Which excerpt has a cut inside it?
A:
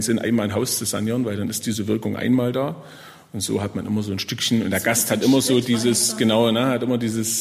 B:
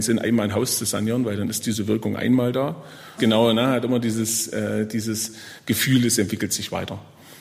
B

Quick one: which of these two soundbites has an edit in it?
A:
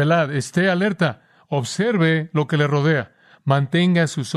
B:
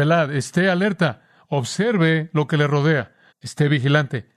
B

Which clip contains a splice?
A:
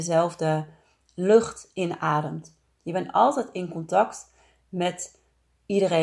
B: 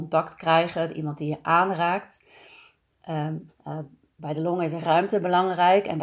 B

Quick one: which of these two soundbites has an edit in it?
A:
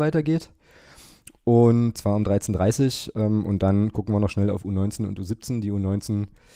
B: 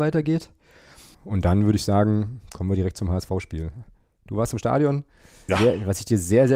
B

